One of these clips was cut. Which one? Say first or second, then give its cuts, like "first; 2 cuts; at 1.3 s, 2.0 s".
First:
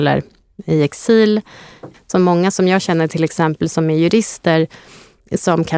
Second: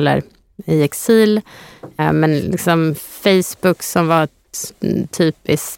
first; 1 cut; at 1.9 s